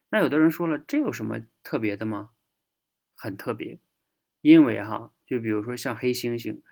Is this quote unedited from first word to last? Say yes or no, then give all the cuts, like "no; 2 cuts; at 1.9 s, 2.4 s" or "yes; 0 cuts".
yes; 0 cuts